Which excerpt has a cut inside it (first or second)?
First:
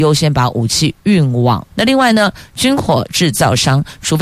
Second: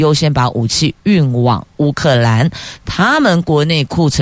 first